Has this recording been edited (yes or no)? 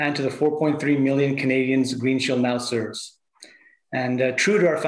no